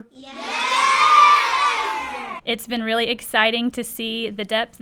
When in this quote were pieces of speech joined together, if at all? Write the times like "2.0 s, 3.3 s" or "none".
2.4 s